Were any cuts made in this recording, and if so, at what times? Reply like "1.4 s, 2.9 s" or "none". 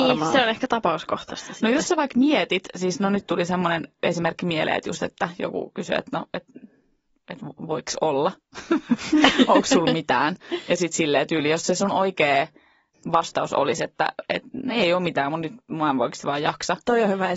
none